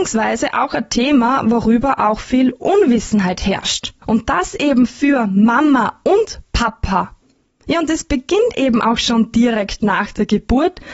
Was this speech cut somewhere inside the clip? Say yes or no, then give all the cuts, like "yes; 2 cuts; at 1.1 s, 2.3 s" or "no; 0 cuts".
yes; 1 cut; at 4.0 s